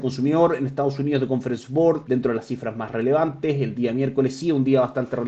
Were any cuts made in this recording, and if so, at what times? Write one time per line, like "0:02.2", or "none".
0:02.1